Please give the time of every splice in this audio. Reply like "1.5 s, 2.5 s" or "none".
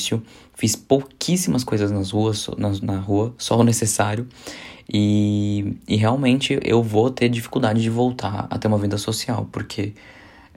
2.8 s